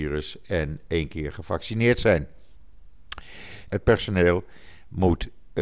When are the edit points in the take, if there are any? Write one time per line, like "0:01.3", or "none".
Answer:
0:03.7